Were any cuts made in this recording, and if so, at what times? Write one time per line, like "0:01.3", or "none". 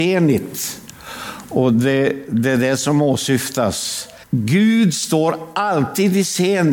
0:04.2